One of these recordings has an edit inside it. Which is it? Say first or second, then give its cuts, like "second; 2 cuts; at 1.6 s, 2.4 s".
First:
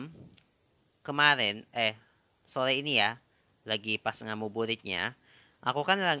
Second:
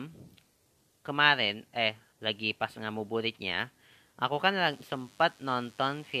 second; 1 cut; at 2.1 s